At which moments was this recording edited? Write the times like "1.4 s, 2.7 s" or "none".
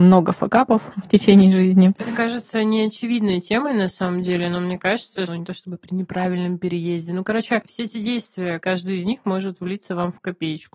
5.3 s, 8.6 s